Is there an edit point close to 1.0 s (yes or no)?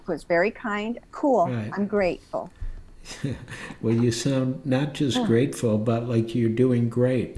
yes